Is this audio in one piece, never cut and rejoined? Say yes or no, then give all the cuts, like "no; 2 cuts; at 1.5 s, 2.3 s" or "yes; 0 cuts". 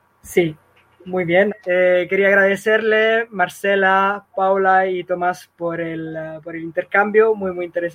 no; 1 cut; at 1.5 s